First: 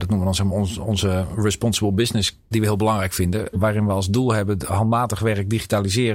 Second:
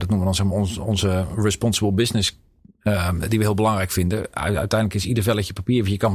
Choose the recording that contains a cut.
first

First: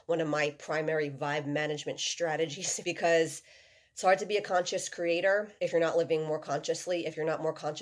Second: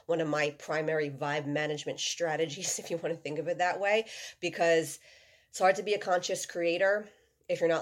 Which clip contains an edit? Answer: first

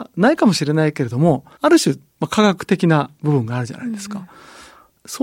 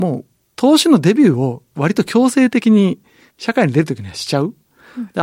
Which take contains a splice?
first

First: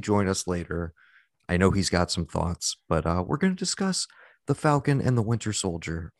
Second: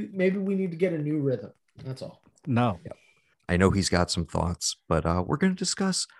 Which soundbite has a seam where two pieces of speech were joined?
second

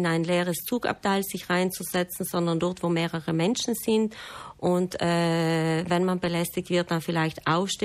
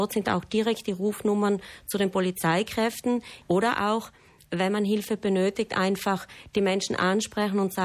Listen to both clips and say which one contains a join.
second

